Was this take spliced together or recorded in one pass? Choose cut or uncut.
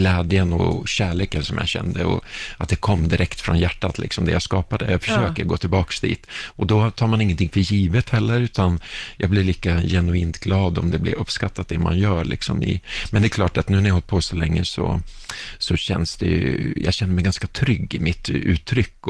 uncut